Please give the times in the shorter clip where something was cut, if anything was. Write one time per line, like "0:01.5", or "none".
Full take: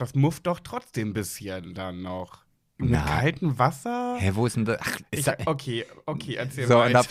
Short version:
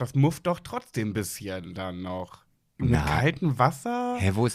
none